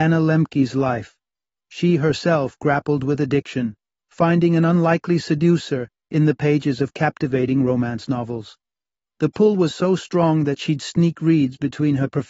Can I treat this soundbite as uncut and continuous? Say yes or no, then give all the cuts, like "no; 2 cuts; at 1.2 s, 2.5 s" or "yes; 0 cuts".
yes; 0 cuts